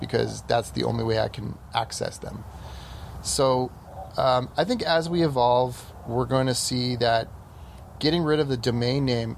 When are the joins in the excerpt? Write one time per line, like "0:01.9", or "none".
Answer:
none